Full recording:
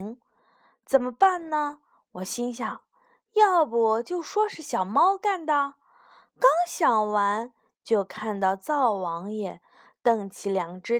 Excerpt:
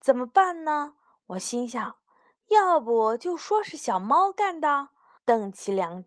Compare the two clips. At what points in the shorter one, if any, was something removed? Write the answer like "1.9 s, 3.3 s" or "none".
5.2 s